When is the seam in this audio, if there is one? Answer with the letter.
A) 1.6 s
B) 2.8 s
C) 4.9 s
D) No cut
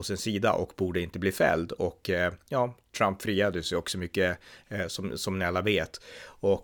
D